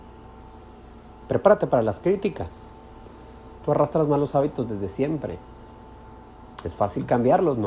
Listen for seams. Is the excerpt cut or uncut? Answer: cut